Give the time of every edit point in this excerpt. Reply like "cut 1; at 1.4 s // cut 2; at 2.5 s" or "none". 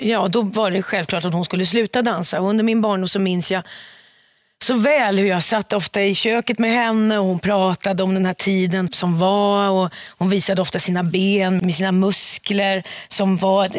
cut 1; at 8.9 s // cut 2; at 11.6 s